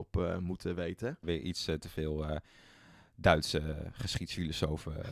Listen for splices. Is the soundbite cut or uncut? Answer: cut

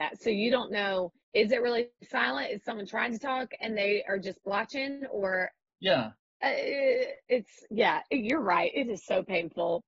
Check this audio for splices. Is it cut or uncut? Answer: uncut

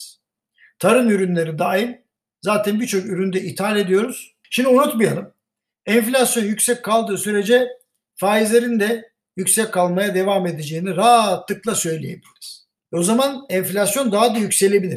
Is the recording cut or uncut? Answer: cut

